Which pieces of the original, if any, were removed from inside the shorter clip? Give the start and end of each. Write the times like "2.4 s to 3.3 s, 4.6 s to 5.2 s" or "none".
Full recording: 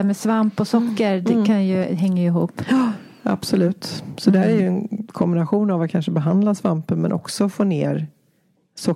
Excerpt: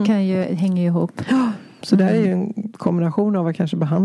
3.2 s to 4.2 s